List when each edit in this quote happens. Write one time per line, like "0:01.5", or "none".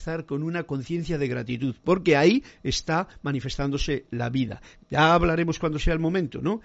0:04.8

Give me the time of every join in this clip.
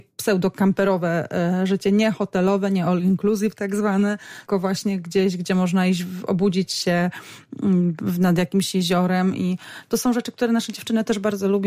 0:04.5

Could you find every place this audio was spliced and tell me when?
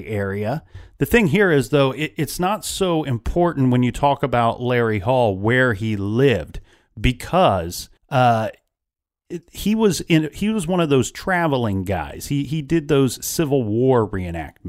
0:08.0

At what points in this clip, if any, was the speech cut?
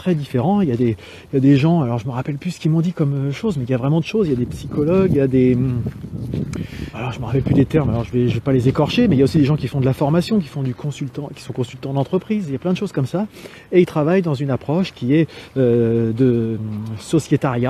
0:06.9

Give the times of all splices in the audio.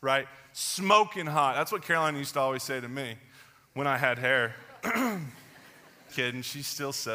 0:06.1

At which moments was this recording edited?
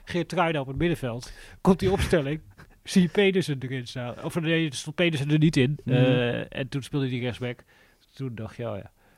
none

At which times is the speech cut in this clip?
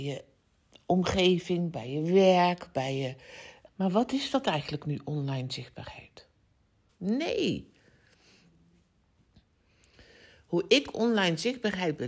0:03.7
0:06.9

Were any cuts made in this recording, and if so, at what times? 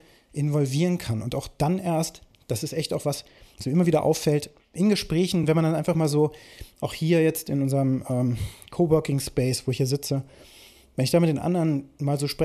none

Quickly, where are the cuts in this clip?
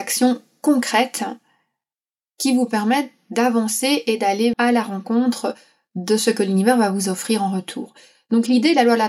0:04.5

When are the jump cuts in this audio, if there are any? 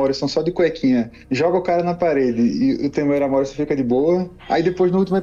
none

